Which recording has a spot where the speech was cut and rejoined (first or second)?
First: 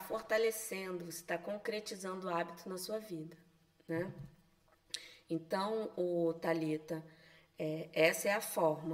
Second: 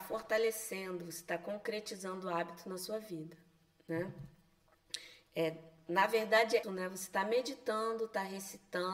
second